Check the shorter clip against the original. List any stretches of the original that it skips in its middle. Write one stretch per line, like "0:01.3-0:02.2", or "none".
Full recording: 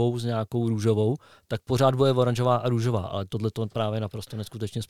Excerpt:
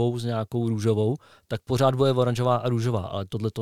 none